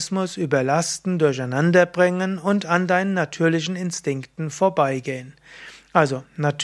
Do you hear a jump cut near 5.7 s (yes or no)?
no